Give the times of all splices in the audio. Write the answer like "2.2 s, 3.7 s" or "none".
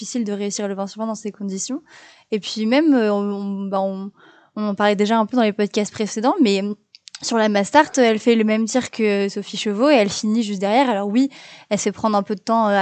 none

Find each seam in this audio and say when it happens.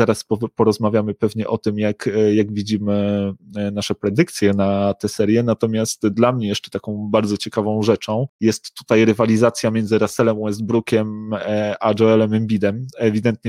none

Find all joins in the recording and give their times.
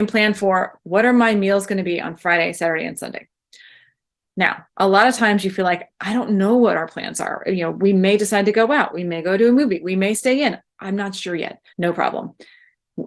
11.7 s

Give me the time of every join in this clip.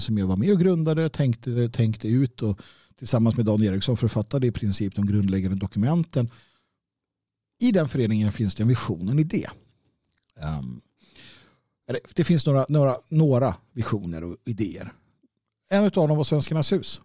none

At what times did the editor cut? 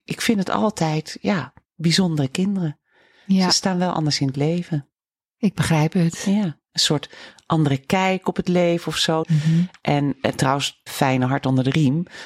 9.2 s, 10.9 s

